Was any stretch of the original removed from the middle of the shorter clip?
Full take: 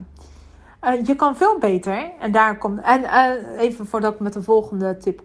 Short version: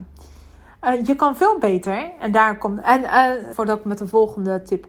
yes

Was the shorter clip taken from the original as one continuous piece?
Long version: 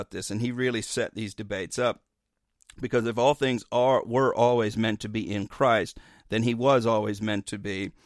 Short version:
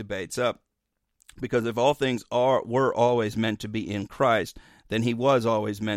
yes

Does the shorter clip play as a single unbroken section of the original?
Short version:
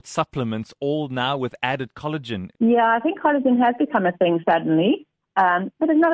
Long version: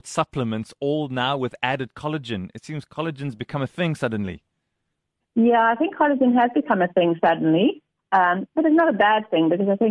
no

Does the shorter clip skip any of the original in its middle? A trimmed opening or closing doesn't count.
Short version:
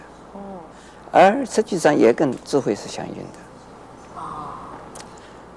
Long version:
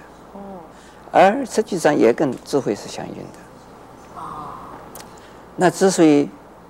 no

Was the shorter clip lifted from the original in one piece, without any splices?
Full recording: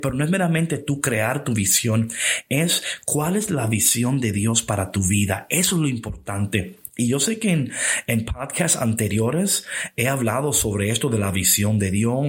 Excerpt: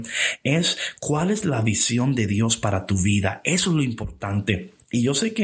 yes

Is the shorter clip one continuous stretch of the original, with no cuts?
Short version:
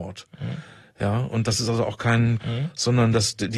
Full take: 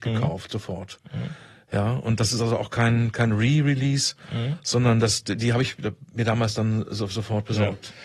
no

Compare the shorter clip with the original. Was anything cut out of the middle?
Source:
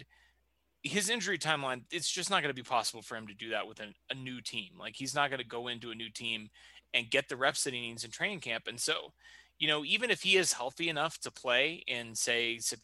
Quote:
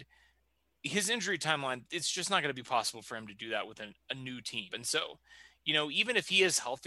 yes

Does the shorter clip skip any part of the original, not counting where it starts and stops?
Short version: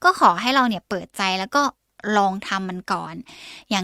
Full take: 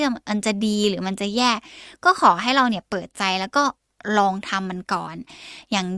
no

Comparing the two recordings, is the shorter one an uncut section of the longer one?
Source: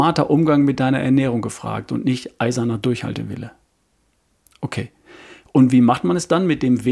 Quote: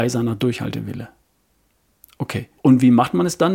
no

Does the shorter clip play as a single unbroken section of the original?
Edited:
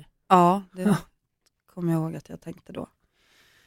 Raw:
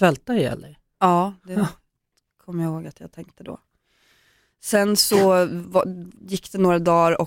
yes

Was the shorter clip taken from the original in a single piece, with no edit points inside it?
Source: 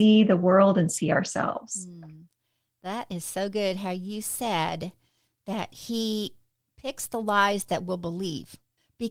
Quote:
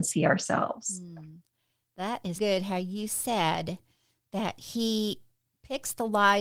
no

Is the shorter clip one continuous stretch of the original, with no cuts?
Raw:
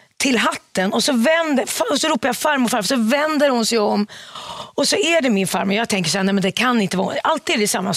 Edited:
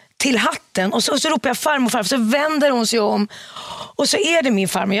no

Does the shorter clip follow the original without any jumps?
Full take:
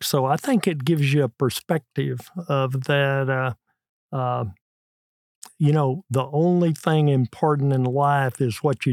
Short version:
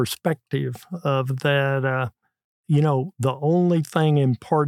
no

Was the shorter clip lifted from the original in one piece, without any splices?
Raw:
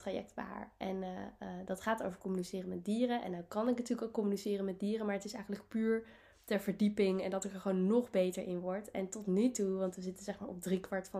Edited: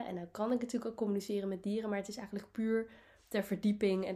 yes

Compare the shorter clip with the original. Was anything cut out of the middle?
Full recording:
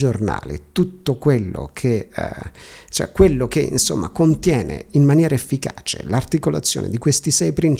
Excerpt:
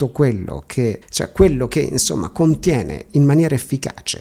yes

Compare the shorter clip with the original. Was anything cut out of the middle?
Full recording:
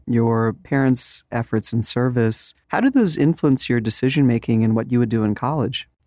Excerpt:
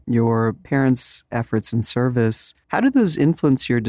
no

